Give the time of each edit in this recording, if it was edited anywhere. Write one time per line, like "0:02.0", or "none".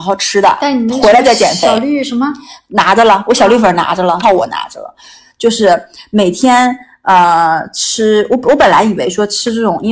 0:04.2